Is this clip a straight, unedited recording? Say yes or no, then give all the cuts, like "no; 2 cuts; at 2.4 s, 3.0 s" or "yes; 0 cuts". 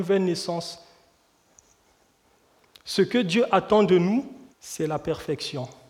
no; 1 cut; at 4.5 s